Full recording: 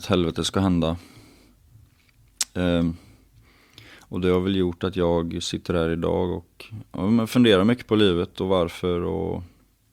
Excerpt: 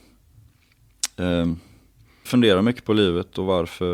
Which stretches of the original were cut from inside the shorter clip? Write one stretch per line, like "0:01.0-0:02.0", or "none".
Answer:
0:03.6-0:07.3